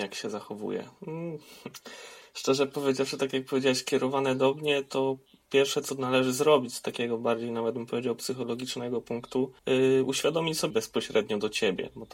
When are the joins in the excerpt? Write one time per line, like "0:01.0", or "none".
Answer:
0:09.6
0:10.7